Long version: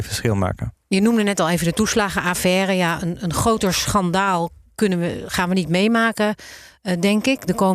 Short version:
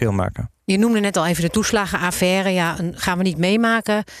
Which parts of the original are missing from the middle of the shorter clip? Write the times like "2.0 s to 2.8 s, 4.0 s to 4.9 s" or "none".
3.2 s to 5.3 s